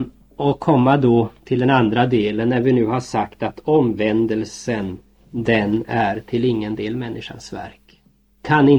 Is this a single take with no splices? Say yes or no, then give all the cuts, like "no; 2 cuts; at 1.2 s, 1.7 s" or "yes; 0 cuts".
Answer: yes; 0 cuts